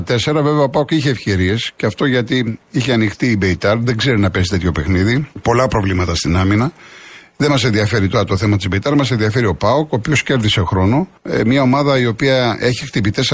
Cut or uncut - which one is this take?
cut